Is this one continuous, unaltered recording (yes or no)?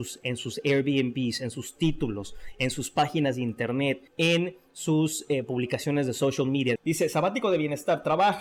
no